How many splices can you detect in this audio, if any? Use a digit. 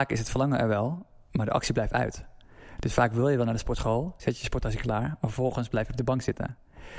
1